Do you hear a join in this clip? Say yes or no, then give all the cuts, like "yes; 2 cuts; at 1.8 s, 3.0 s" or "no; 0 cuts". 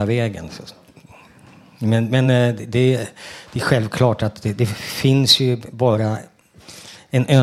no; 0 cuts